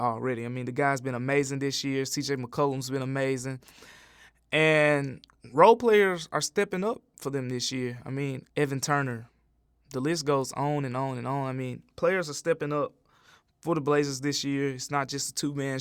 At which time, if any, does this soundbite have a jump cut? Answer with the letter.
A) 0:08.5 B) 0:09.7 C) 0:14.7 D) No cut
A